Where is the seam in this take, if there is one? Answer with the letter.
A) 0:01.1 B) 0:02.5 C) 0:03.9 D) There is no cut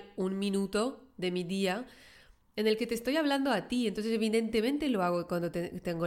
D